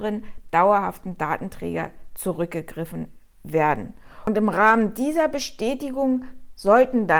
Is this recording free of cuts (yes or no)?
yes